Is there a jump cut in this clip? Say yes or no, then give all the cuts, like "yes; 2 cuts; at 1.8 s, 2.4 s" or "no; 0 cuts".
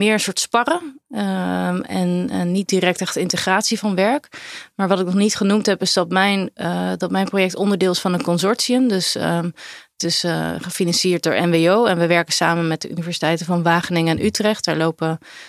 no; 0 cuts